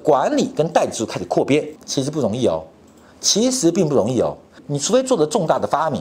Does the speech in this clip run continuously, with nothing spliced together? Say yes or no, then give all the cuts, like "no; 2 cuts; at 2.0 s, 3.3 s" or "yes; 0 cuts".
no; 2 cuts; at 1.8 s, 4.6 s